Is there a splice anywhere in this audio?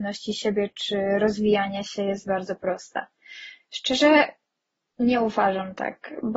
no; 0 cuts

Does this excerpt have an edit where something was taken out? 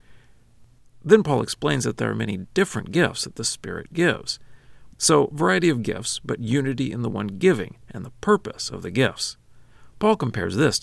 yes; 1 cut; at 4.9 s

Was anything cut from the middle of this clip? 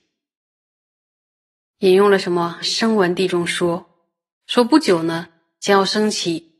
no; 0 cuts

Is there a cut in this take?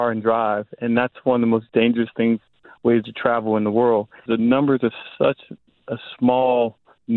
yes; 1 cut; at 4.3 s

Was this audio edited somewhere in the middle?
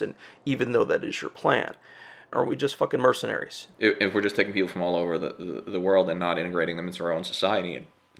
yes; 2 cuts; at 2.3 s, 3.7 s

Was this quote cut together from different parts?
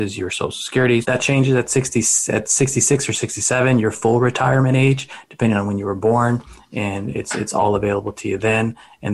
yes; 1 cut; at 1.0 s

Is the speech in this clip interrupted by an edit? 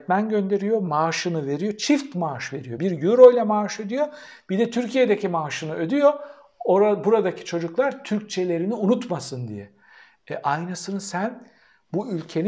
no; 0 cuts

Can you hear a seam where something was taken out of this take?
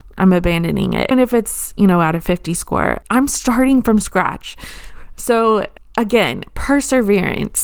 yes; 1 cut; at 1.1 s

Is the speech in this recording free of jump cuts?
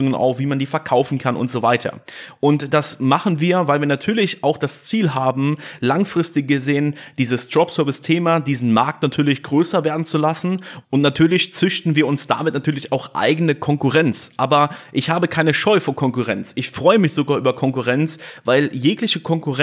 yes; 0 cuts

